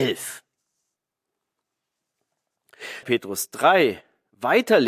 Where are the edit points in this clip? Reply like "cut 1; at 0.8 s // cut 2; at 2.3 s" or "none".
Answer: cut 1; at 3.0 s